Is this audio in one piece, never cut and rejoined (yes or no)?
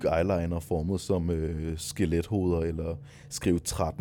yes